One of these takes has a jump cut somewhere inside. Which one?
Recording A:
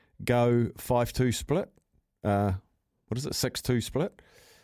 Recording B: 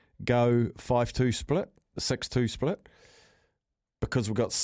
B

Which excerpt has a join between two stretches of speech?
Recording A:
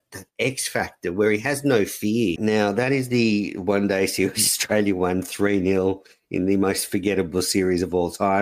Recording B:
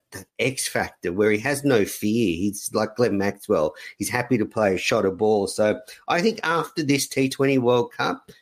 A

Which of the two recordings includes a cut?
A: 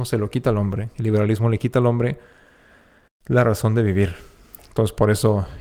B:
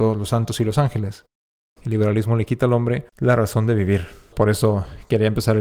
B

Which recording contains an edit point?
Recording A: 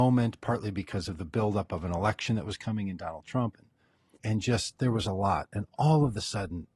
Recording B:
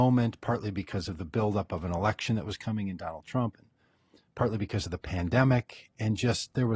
A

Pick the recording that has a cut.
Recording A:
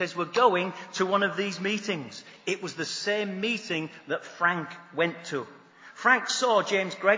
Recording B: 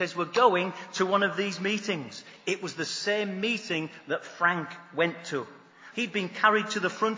B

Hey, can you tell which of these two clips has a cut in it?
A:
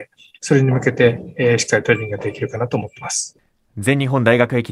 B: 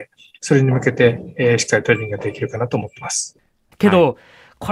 B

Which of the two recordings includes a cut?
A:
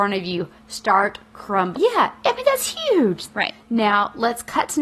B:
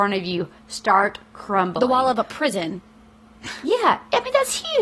A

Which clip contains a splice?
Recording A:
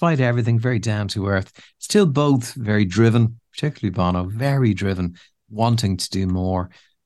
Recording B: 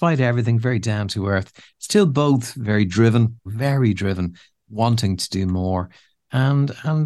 B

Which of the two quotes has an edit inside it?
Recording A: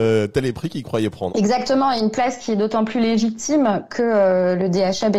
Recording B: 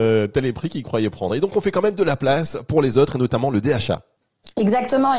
A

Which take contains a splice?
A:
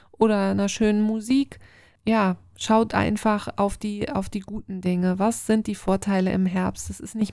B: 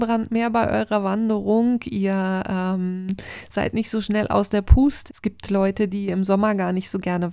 B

